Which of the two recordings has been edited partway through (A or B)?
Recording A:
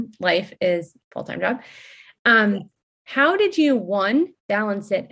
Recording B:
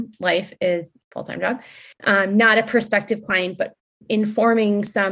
B